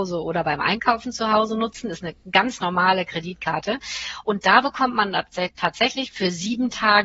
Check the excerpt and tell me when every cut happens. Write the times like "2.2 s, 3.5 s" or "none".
6.1 s